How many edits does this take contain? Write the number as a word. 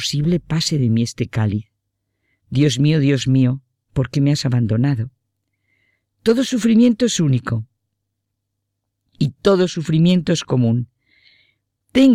zero